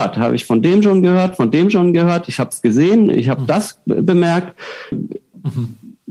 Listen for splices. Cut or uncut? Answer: cut